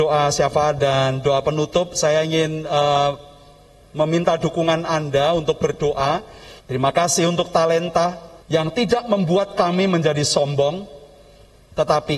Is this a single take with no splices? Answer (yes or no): no